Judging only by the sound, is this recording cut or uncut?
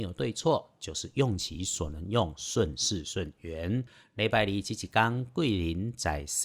uncut